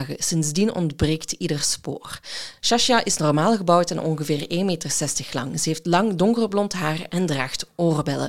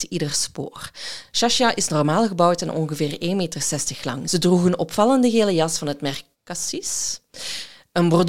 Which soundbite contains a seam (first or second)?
second